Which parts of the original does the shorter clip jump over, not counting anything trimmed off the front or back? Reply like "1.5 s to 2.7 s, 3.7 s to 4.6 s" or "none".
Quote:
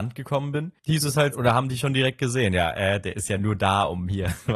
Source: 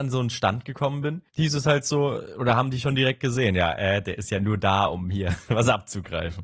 1.8 s to 2.3 s